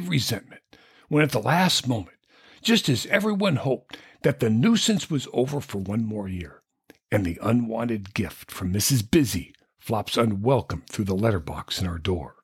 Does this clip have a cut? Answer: yes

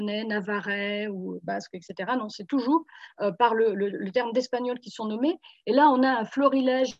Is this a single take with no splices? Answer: yes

